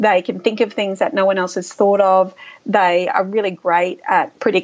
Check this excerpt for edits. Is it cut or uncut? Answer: uncut